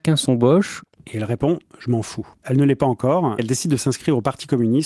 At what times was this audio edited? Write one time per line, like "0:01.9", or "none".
0:00.9
0:02.4